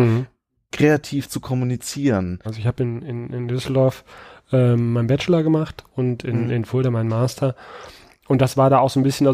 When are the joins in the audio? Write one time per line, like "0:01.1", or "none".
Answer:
0:02.5